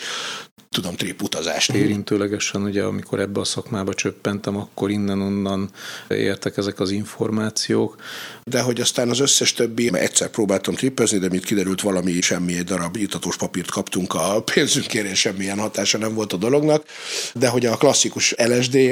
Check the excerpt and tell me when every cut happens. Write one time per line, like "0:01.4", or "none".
0:01.7
0:08.4
0:09.9